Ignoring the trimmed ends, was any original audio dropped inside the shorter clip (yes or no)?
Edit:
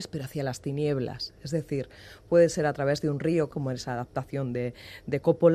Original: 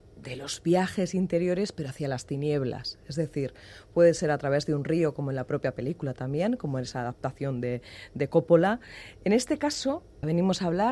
yes